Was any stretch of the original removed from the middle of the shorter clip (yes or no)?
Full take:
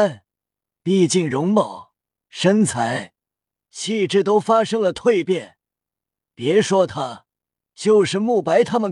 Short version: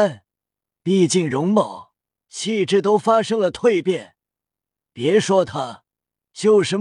yes